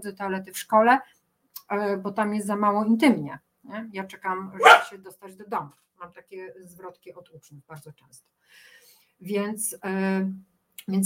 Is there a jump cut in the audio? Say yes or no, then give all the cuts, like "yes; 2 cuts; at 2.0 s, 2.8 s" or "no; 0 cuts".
no; 0 cuts